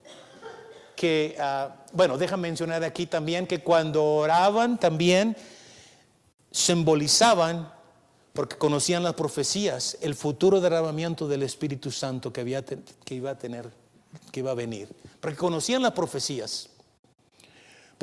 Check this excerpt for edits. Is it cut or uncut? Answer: uncut